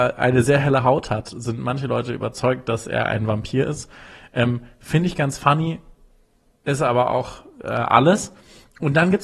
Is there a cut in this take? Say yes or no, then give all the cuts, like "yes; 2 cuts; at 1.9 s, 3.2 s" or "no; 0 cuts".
no; 0 cuts